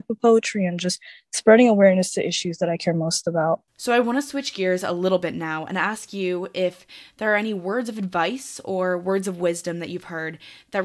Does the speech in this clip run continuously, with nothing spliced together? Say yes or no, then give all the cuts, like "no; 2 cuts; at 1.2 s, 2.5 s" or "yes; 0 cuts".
no; 1 cut; at 3.7 s